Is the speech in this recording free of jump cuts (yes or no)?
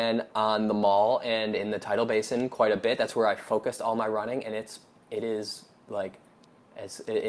yes